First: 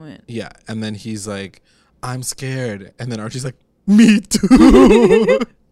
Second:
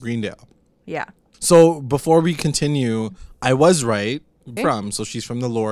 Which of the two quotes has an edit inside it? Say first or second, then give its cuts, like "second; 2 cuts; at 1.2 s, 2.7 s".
second; 1 cut; at 4.6 s